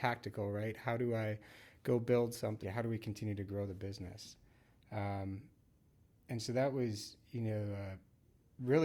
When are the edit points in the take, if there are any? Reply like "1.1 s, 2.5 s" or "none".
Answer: 2.6 s